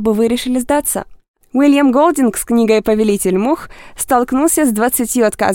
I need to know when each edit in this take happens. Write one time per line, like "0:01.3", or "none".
0:01.4